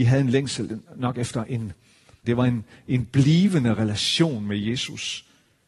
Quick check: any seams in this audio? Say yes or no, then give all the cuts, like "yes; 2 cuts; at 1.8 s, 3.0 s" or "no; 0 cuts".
yes; 1 cut; at 2.2 s